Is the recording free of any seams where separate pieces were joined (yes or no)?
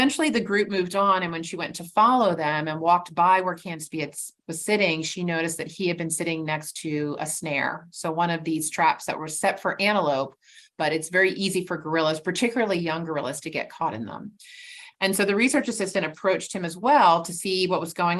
no